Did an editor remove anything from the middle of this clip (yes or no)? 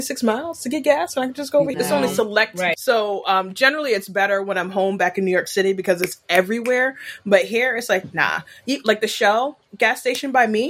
yes